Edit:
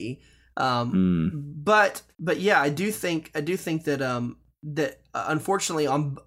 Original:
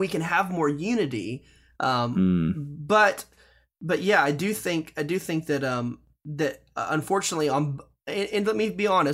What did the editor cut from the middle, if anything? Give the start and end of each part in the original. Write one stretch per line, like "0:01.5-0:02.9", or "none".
0:03.3-0:03.7